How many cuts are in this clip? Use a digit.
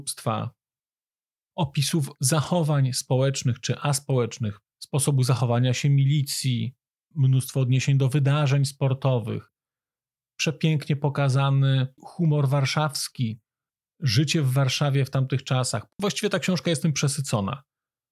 2